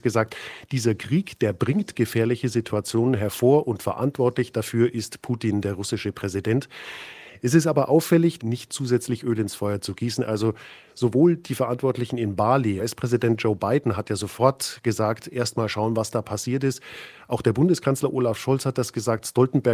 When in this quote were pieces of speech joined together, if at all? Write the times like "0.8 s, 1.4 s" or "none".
8.4 s, 12.8 s